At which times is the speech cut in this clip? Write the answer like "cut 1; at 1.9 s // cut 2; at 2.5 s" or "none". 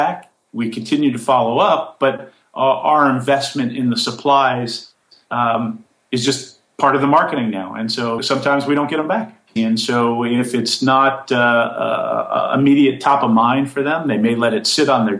cut 1; at 8.2 s // cut 2; at 9.6 s